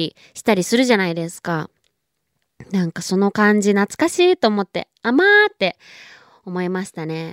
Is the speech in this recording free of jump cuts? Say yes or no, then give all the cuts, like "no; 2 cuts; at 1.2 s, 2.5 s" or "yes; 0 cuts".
yes; 0 cuts